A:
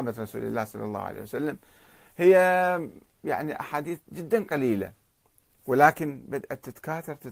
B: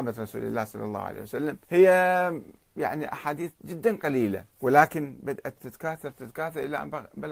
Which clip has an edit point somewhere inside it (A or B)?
B